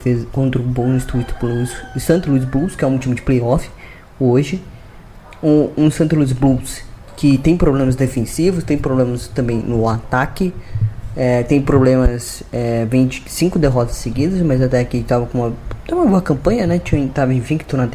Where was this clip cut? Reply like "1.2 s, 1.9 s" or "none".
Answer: none